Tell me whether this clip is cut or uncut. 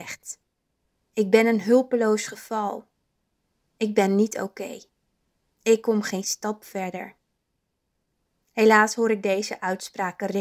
uncut